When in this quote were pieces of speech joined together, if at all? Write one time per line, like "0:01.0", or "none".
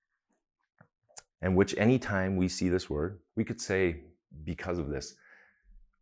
0:01.3
0:03.3